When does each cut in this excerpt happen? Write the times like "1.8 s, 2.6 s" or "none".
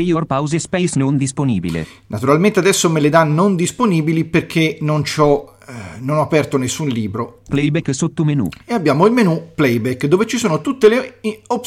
7.4 s